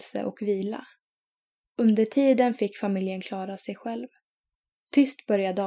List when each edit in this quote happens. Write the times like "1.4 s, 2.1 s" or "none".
4.7 s